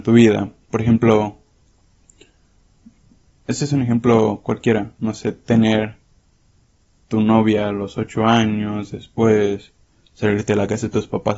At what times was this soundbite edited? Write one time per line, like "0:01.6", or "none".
none